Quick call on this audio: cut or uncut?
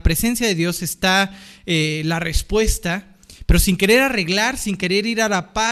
uncut